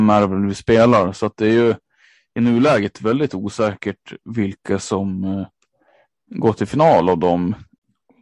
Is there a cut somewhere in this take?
no; 0 cuts

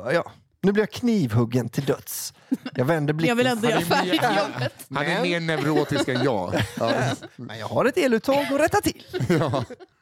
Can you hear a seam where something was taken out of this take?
no; 0 cuts

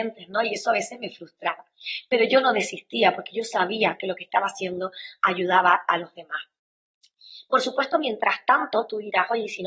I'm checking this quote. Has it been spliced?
no; 0 cuts

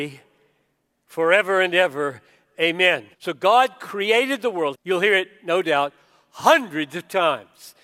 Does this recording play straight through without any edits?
no; 2 cuts; at 3.1 s, 4.7 s

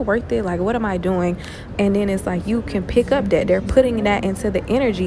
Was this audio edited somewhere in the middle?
yes; 1 cut; at 1.8 s

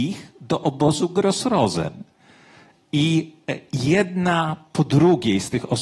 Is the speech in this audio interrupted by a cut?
no; 0 cuts

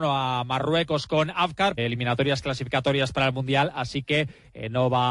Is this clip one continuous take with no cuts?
no; 1 cut; at 1.8 s

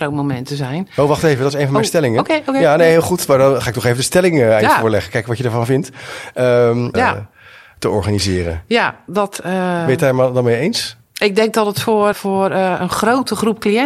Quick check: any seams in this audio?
yes; 2 cuts; at 6.9 s, 12.1 s

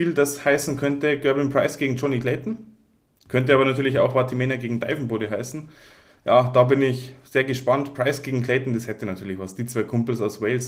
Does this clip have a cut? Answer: no; 0 cuts

